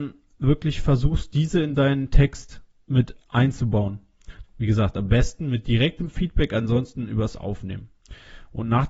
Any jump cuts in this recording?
yes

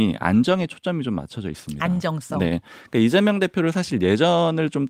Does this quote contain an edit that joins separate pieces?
no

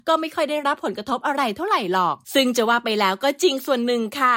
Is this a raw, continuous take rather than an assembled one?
no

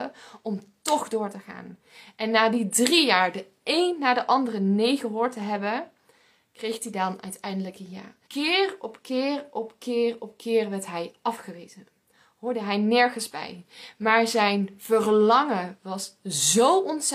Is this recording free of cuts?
no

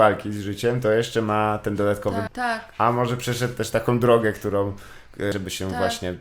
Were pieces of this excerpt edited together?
yes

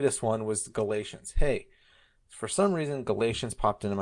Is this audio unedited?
yes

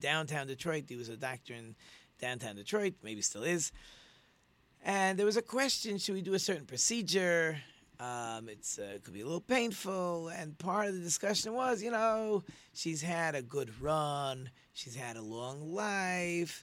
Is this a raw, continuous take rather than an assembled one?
yes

